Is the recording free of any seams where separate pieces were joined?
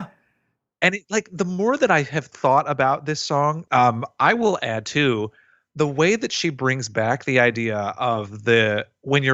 no; 1 cut; at 3.7 s

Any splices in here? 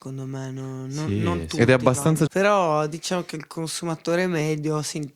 yes; 1 cut; at 2.3 s

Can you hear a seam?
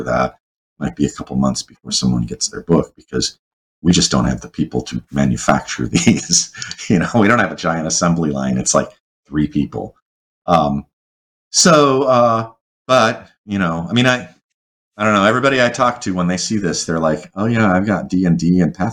no; 0 cuts

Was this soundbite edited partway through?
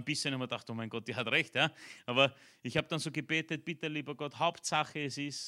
no; 0 cuts

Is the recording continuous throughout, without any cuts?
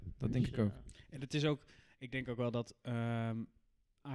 yes; 0 cuts

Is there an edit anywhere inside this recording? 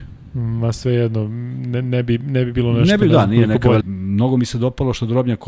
yes; 1 cut; at 3.8 s

